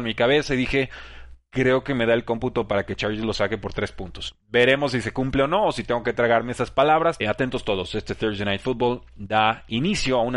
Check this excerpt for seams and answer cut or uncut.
cut